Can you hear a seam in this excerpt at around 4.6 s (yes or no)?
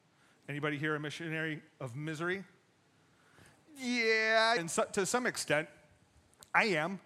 yes